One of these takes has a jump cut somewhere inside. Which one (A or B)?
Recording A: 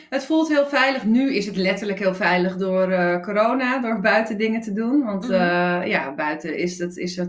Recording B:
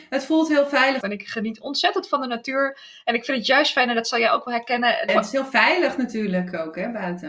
B